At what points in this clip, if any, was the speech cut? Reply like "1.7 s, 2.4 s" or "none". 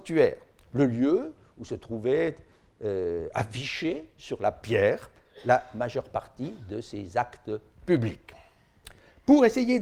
none